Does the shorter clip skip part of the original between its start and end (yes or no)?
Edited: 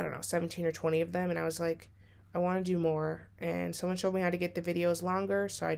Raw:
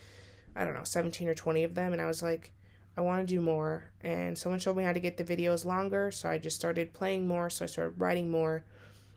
no